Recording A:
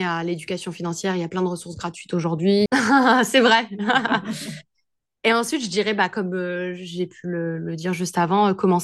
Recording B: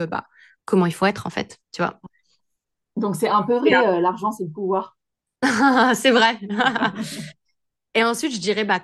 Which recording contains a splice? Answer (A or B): A